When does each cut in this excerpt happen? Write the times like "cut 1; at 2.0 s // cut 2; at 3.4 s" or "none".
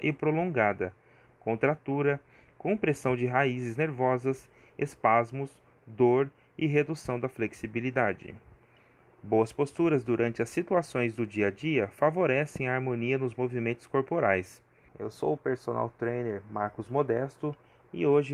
cut 1; at 1.3 s // cut 2; at 14.9 s